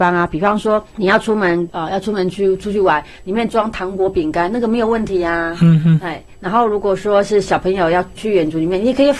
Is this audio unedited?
yes; 0 cuts

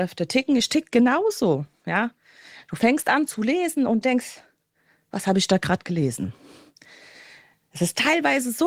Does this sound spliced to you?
no; 0 cuts

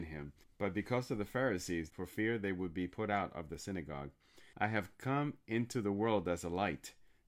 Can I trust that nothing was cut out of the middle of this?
no; 2 cuts; at 1.9 s, 4.5 s

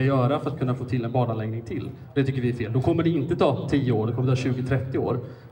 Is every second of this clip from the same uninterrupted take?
yes; 0 cuts

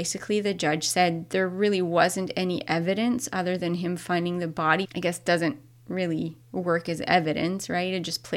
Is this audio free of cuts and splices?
no; 2 cuts; at 4.8 s, 6.4 s

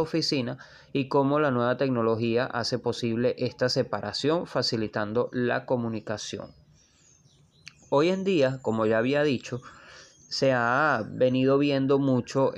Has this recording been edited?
no; 0 cuts

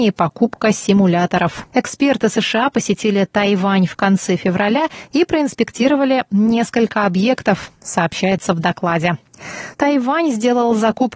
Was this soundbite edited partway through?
yes; 2 cuts; at 1.7 s, 9.7 s

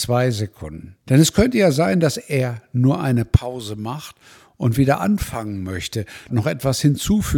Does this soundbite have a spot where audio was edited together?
yes; 2 cuts; at 1.0 s, 6.3 s

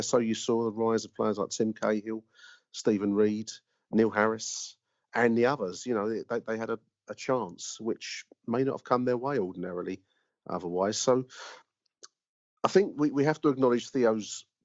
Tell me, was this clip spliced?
no; 0 cuts

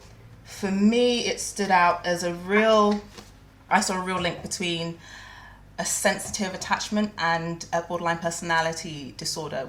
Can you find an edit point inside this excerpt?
no; 0 cuts

